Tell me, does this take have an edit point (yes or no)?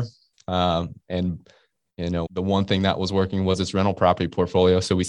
yes